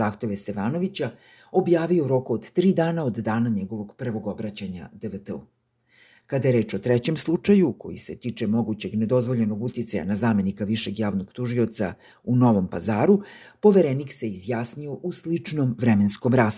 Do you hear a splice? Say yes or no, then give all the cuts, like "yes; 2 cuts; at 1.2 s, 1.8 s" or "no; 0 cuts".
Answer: no; 0 cuts